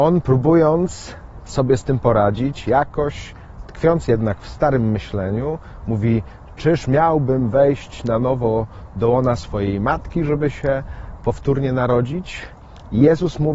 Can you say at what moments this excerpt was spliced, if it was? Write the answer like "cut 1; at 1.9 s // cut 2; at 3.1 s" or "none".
none